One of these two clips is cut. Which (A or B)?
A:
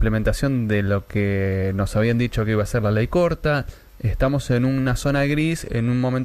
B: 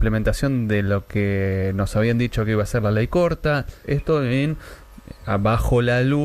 B